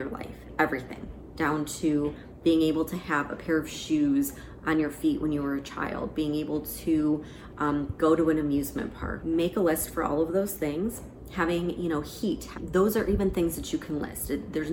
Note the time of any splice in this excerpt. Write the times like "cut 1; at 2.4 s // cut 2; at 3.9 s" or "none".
cut 1; at 9.2 s // cut 2; at 12.5 s